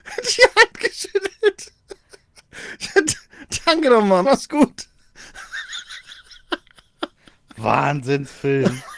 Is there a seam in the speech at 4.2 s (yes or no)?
yes